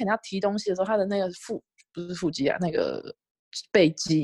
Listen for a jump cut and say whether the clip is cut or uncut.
uncut